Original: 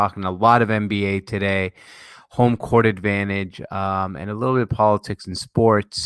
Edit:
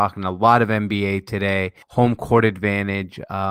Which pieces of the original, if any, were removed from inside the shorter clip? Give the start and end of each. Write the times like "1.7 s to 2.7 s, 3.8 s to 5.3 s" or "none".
1.8 s to 2.2 s